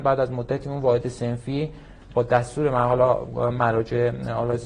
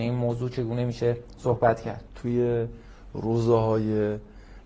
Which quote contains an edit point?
second; 1 cut; at 2.1 s

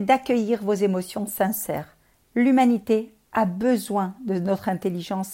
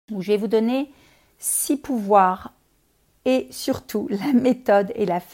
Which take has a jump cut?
first; 1 cut; at 2.2 s

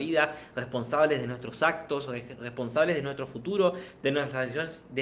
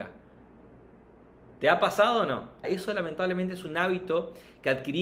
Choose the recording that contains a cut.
second; 1 cut; at 2.6 s

